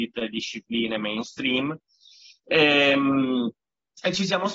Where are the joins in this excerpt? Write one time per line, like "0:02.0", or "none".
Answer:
none